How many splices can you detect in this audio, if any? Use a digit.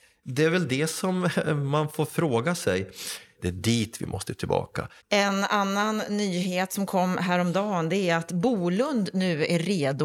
2